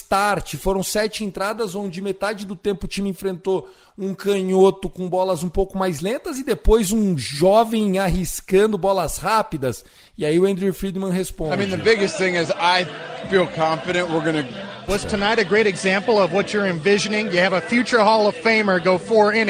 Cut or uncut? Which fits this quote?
cut